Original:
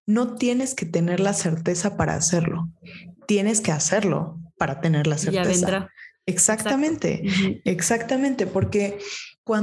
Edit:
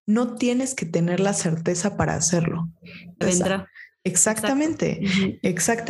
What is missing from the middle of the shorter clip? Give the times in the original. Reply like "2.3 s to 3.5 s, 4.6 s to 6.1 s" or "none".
3.2 s to 5.4 s